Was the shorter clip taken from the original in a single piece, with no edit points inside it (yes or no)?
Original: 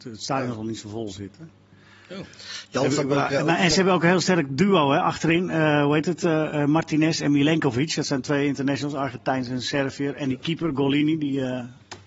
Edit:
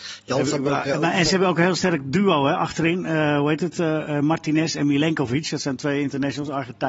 yes